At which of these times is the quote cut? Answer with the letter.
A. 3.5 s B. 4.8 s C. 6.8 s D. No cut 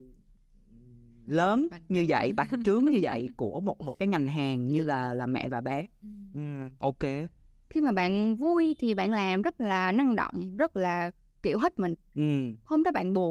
C